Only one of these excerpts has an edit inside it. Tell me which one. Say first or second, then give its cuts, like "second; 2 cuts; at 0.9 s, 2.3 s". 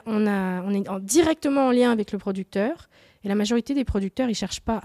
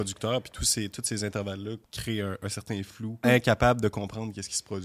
second; 2 cuts; at 1.8 s, 3.2 s